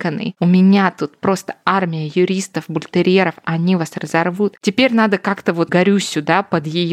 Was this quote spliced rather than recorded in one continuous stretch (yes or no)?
yes